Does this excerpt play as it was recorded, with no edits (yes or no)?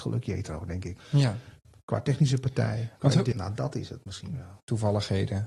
no